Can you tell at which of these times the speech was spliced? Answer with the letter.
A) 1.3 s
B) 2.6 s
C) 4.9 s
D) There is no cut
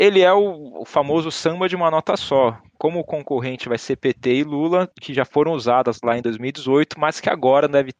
C